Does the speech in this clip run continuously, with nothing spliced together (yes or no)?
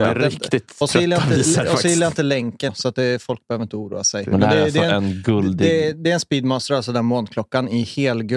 no